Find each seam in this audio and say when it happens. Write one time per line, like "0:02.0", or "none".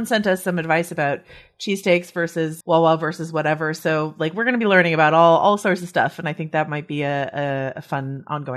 0:02.6